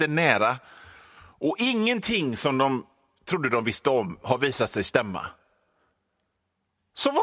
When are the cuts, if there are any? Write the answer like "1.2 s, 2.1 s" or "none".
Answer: none